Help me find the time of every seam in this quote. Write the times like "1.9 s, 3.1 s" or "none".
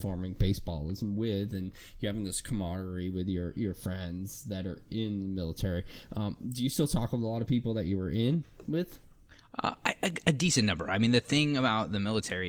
none